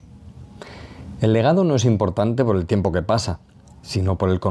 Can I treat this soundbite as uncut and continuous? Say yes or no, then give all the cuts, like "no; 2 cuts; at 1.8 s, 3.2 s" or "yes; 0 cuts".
yes; 0 cuts